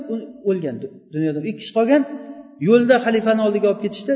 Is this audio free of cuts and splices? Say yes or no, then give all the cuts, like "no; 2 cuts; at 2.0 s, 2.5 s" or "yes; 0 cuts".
yes; 0 cuts